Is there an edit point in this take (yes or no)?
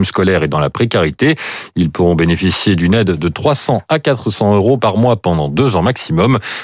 no